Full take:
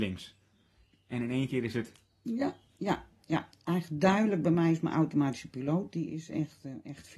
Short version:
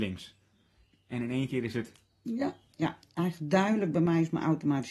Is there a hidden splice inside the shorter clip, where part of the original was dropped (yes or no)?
yes